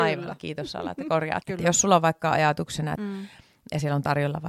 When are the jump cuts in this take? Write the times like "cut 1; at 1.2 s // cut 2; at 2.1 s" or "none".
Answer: cut 1; at 1.4 s // cut 2; at 3.0 s